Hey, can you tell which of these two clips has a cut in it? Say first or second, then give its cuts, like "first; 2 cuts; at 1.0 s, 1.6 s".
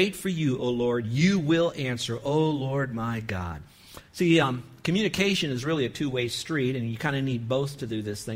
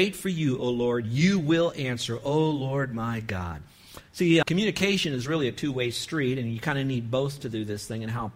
second; 1 cut; at 4.4 s